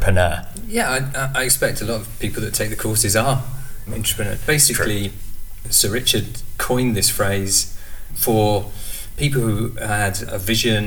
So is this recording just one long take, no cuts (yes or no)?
yes